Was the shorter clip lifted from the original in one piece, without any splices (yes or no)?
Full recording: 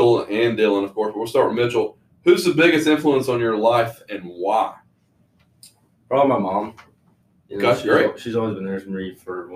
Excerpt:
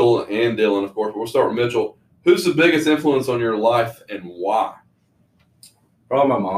yes